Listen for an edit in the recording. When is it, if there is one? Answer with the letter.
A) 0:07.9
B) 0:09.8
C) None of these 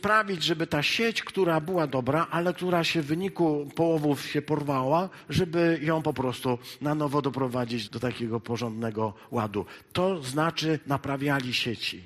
A